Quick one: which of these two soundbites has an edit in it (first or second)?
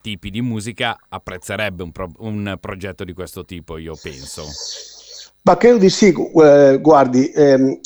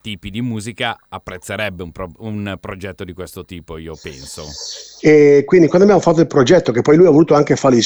second